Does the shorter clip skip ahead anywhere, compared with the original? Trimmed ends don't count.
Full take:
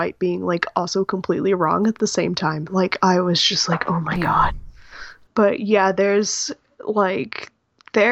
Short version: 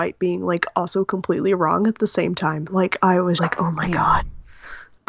yes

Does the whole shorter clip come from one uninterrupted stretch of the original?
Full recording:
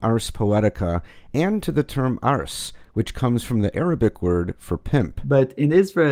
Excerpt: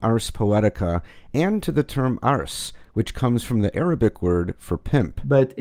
yes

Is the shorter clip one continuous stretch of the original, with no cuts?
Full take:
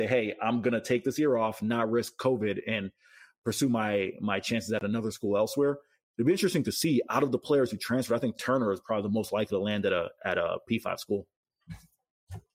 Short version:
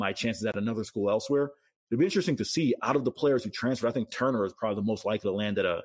yes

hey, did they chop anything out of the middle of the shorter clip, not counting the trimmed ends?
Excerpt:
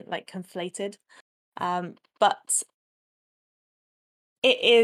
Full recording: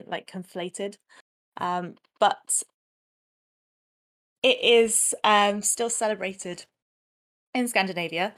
no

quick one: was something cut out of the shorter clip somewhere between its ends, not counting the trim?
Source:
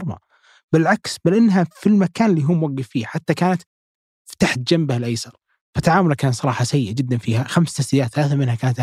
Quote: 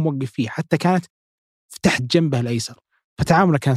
no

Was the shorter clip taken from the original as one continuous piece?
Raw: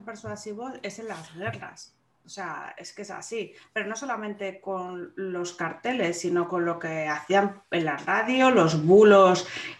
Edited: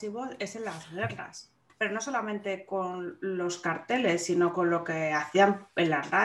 no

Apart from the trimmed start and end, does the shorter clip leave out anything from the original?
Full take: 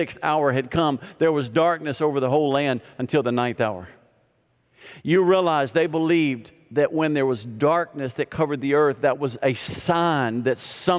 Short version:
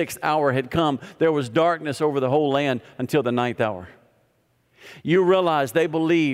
no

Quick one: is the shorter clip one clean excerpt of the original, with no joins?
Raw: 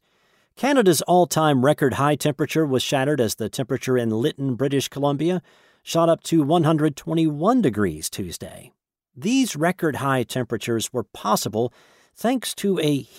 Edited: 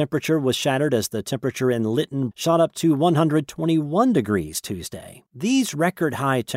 no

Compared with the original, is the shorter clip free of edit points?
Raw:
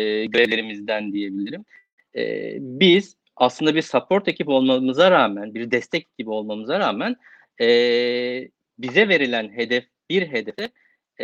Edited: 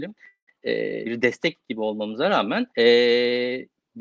no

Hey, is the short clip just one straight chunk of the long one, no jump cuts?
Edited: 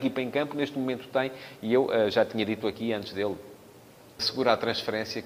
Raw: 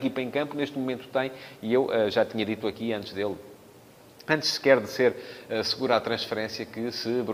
no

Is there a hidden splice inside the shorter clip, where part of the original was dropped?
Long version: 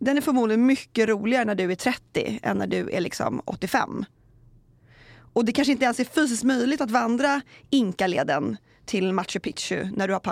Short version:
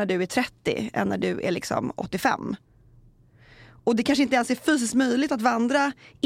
no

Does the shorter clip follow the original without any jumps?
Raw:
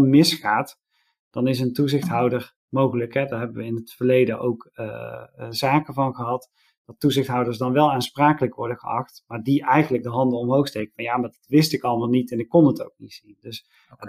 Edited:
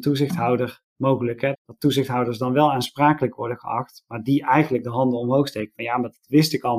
no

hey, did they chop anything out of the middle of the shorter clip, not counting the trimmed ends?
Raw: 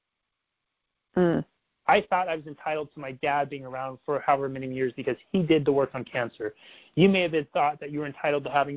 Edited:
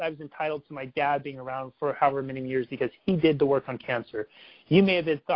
no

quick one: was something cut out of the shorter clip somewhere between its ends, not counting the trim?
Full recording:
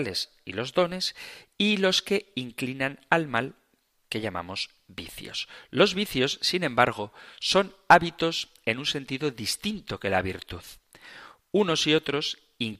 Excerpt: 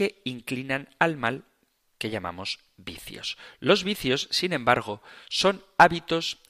no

